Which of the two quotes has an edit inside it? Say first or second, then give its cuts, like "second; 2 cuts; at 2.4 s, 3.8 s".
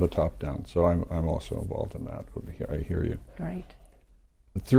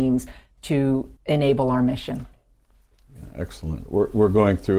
second; 1 cut; at 1.2 s